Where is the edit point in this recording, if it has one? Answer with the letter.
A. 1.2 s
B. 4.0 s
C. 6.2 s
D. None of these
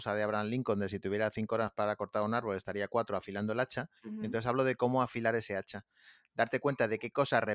B